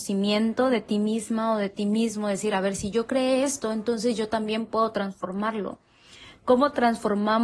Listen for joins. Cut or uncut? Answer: uncut